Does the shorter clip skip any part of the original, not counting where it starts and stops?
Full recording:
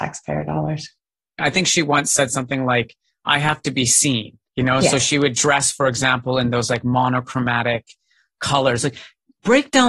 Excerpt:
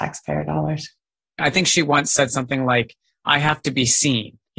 no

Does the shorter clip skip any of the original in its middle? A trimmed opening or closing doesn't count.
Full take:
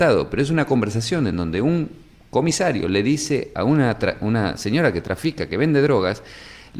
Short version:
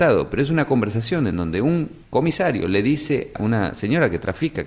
yes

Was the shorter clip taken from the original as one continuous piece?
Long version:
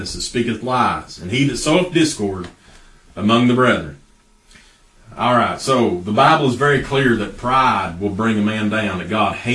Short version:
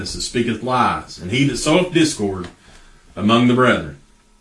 yes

